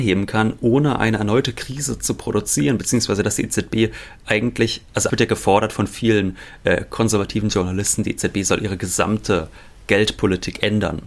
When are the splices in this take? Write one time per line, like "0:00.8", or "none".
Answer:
0:05.1